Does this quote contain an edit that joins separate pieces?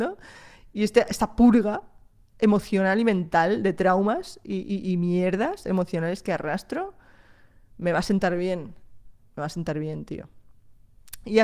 no; 0 cuts

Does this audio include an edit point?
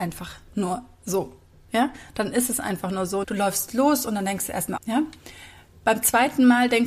yes; 2 cuts; at 3.2 s, 4.8 s

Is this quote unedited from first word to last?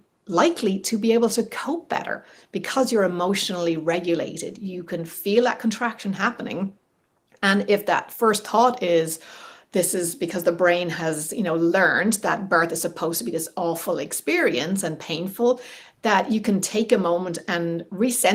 yes; 0 cuts

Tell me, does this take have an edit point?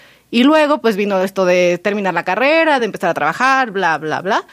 no; 0 cuts

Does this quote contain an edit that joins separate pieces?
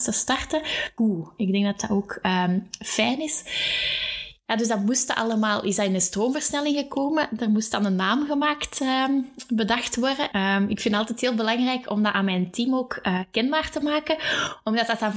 yes; 2 cuts; at 1.0 s, 10.3 s

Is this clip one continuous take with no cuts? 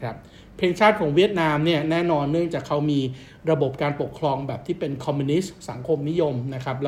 yes; 0 cuts

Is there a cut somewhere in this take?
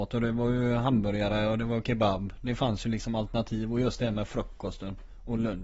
no; 0 cuts

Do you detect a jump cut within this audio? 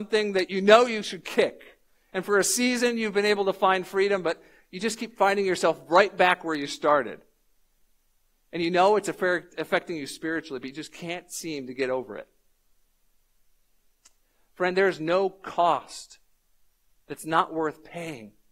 no; 0 cuts

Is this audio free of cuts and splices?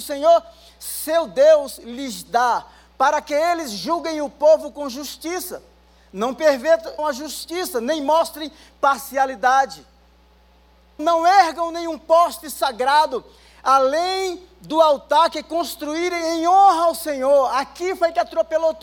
no; 2 cuts; at 7.0 s, 11.0 s

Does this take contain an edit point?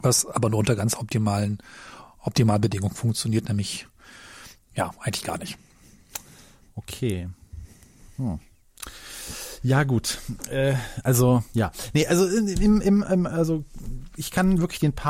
no; 0 cuts

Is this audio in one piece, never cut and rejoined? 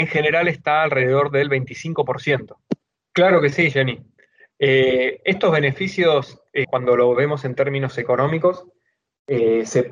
no; 2 cuts; at 2.9 s, 6.6 s

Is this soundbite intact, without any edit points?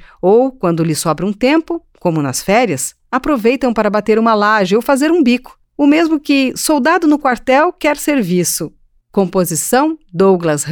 no; 1 cut; at 9.1 s

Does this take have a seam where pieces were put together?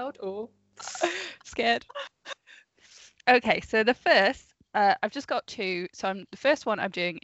no; 0 cuts

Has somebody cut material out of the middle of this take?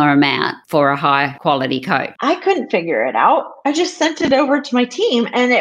yes; 1 cut; at 2.2 s

